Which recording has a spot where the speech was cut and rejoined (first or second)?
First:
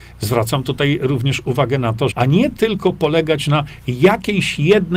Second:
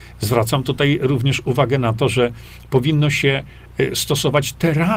first